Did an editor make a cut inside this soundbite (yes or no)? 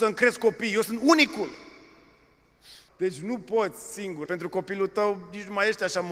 yes